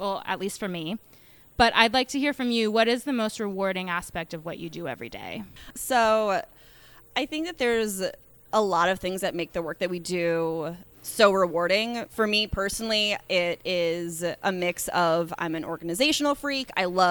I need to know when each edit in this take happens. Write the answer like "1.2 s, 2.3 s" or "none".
10.9 s, 12.1 s